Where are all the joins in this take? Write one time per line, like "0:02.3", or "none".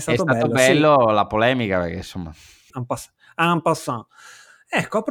0:02.7